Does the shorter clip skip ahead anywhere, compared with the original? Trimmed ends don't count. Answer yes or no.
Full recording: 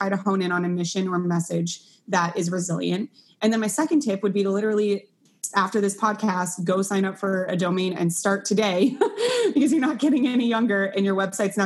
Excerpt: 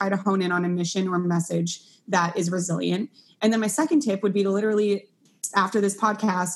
no